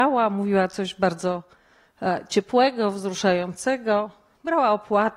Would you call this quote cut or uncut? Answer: uncut